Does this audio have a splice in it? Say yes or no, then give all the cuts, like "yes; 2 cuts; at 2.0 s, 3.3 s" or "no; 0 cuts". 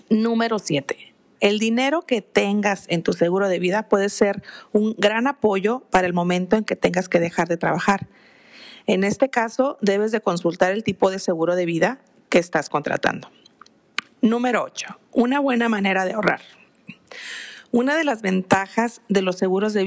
yes; 1 cut; at 1.3 s